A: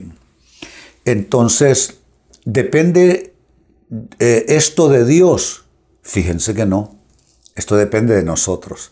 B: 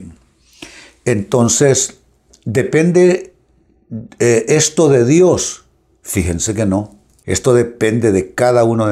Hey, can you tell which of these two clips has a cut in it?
B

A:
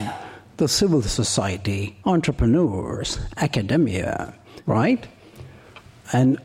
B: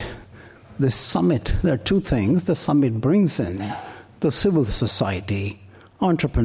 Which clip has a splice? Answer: A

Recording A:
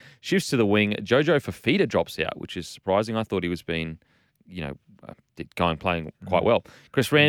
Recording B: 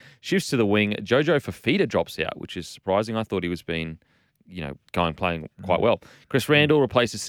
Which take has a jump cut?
B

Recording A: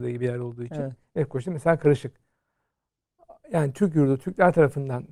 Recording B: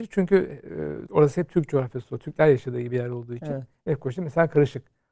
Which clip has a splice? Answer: B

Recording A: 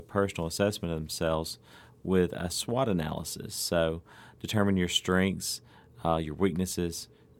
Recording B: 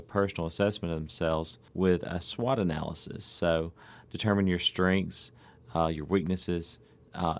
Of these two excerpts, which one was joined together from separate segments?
B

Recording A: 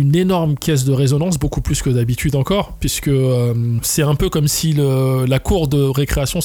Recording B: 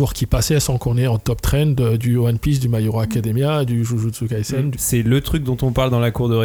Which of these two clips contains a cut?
B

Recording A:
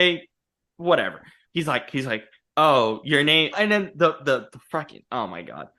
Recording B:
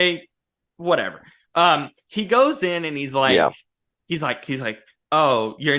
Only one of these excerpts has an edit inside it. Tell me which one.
A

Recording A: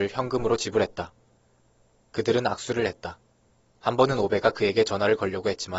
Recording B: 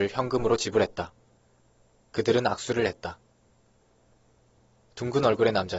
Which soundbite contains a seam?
A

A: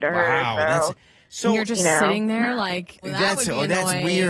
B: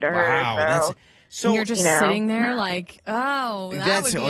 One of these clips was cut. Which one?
A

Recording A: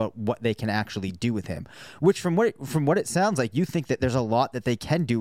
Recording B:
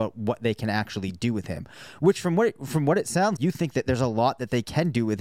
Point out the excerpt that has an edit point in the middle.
B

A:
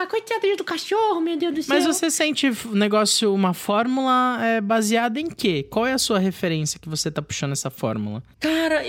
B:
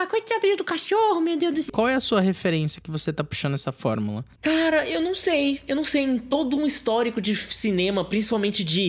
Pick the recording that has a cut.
B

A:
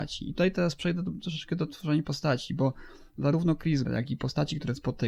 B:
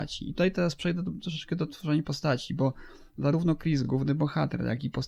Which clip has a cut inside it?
A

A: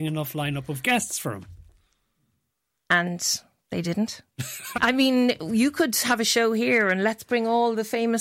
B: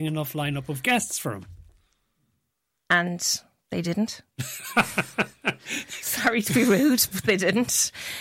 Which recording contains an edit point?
A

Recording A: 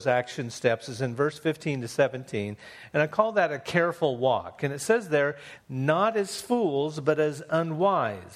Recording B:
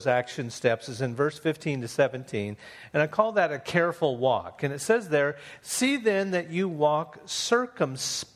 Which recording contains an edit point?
A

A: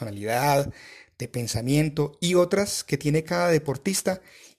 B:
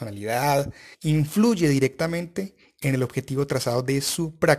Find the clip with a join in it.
B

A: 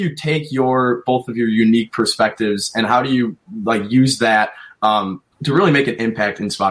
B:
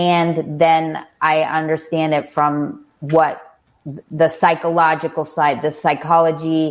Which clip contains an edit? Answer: A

